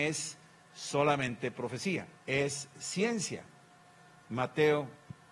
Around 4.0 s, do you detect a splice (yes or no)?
no